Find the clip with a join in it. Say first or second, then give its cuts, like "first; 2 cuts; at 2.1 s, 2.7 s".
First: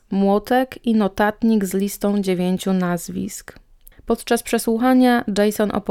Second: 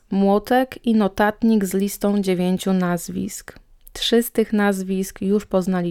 first; 1 cut; at 3.9 s